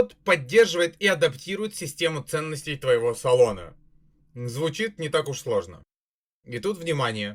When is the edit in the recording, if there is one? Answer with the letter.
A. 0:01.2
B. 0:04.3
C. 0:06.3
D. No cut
C